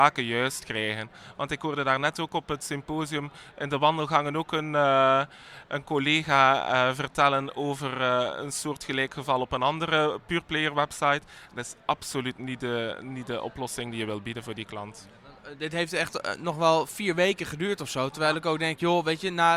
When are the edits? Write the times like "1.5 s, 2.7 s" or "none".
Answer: none